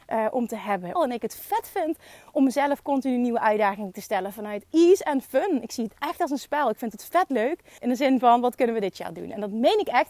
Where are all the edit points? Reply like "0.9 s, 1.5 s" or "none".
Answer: 1.0 s, 7.8 s